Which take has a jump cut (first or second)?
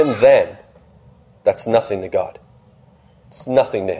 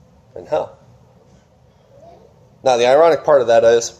second